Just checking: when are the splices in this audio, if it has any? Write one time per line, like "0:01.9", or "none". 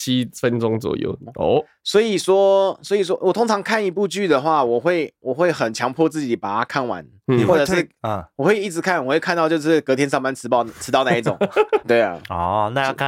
0:01.3
0:11.8